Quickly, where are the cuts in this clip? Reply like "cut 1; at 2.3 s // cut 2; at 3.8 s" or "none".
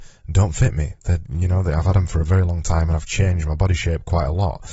none